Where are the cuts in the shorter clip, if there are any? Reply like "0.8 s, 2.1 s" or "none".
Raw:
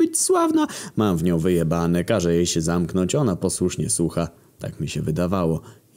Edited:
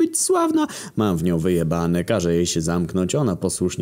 none